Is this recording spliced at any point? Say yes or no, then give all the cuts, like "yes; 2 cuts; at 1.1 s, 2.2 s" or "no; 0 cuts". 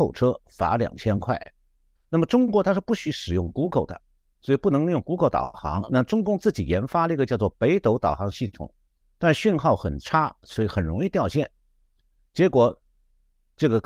no; 0 cuts